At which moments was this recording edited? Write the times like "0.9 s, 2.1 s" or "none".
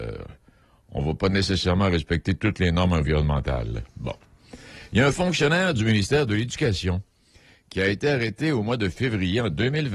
3.9 s